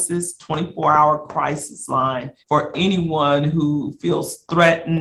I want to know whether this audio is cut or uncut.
cut